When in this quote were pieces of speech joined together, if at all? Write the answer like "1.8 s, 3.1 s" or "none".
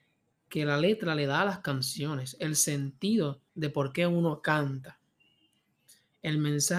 3.5 s